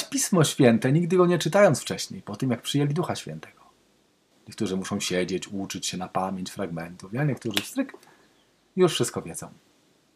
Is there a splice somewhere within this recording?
yes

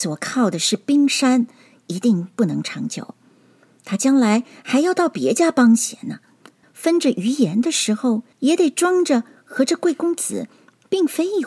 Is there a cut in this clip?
yes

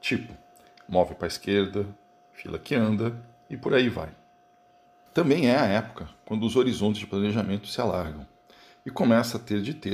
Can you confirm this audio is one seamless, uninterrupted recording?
yes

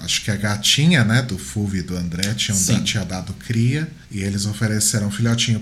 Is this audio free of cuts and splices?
no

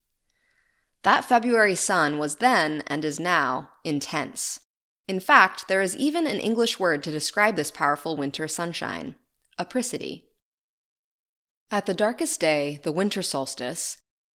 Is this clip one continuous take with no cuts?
yes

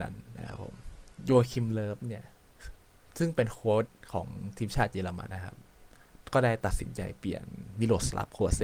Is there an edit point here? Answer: yes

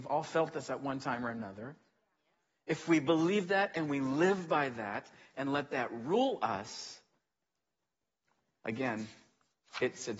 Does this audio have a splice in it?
no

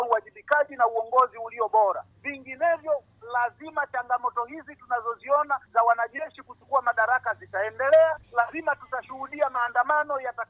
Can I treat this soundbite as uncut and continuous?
yes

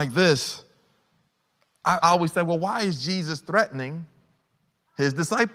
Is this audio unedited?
no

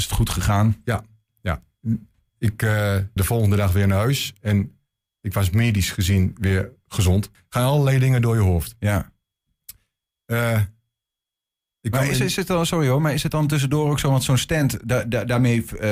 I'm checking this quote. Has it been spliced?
yes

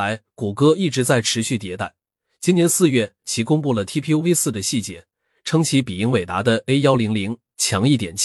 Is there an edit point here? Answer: no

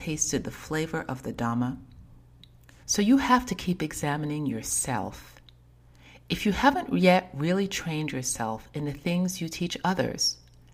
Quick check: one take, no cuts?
no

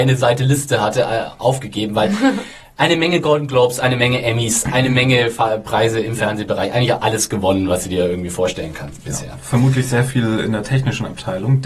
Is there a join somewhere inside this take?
no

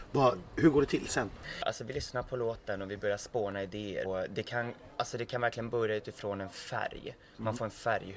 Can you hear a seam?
yes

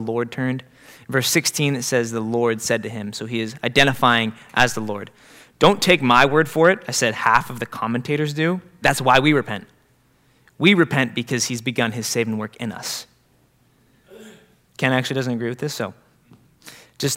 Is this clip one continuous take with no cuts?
no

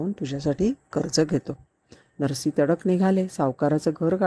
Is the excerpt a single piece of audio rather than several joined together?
yes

